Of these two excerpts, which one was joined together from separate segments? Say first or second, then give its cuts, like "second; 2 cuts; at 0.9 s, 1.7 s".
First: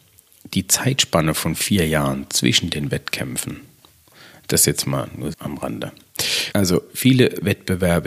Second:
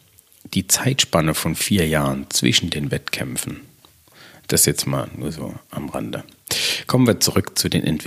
first; 2 cuts; at 5.3 s, 6.5 s